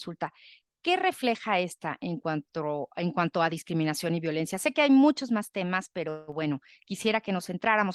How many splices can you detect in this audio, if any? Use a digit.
0